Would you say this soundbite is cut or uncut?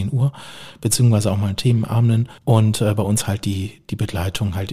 cut